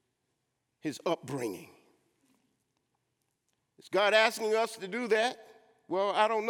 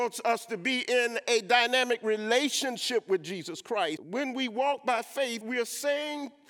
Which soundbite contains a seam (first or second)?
second